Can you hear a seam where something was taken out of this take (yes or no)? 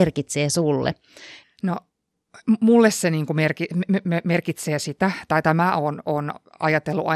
yes